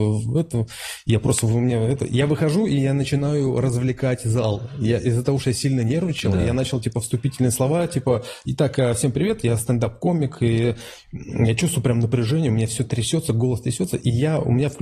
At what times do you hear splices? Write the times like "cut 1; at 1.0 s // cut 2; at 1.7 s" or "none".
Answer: none